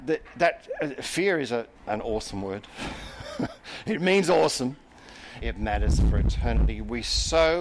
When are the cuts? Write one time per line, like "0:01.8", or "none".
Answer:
0:01.8
0:05.4